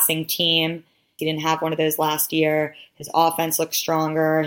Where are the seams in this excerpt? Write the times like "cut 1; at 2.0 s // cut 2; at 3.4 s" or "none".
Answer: cut 1; at 1.2 s